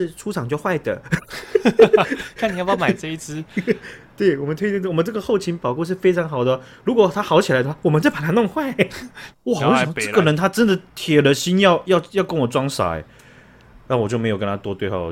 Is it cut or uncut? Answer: cut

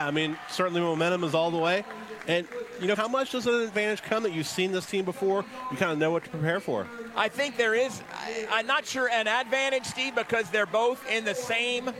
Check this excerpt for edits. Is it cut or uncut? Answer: cut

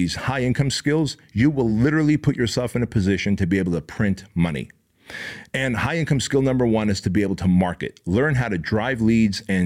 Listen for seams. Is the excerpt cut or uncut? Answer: uncut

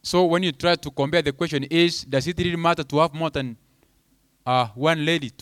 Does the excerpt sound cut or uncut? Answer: uncut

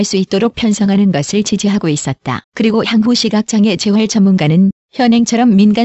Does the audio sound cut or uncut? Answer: cut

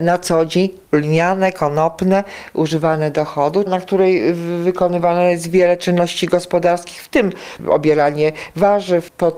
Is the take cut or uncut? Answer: cut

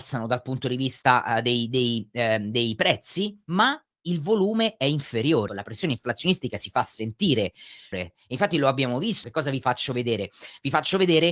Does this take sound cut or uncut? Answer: cut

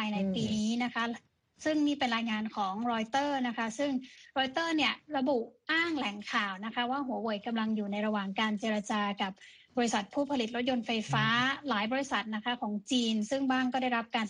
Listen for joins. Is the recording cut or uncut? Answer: uncut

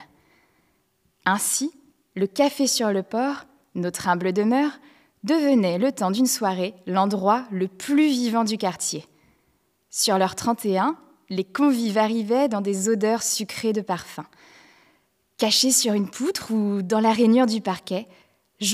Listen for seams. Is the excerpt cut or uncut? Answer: uncut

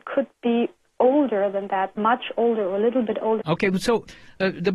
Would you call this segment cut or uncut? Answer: cut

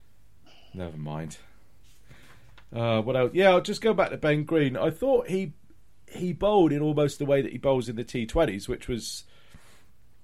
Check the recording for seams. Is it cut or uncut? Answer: uncut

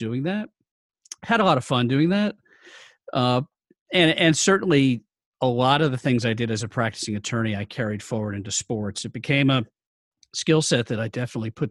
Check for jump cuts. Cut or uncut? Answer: uncut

